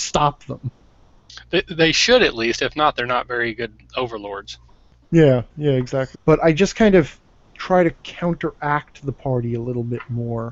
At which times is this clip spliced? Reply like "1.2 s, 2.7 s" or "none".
6.1 s